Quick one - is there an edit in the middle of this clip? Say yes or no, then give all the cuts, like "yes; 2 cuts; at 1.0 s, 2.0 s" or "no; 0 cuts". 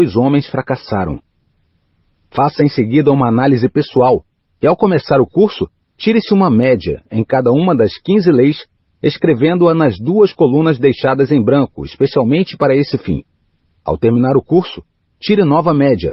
no; 0 cuts